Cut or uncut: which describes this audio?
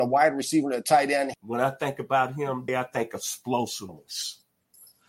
cut